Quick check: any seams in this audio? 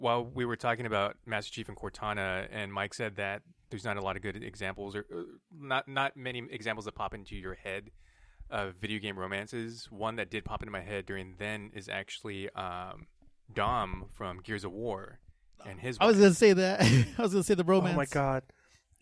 no; 0 cuts

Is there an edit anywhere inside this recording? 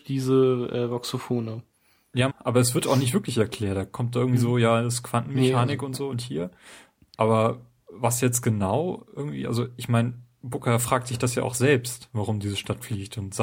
yes; 1 cut; at 2.3 s

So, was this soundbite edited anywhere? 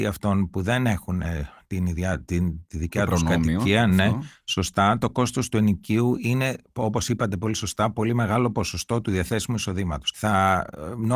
yes; 1 cut; at 10.1 s

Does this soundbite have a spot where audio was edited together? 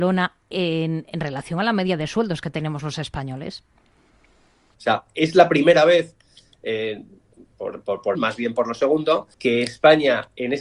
yes; 3 cuts; at 4.7 s, 8.1 s, 9.3 s

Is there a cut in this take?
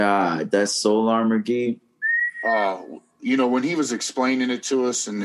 no; 0 cuts

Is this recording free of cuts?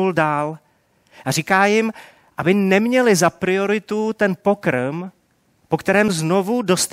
yes; 0 cuts

